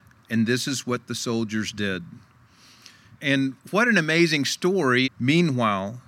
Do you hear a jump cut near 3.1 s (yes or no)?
yes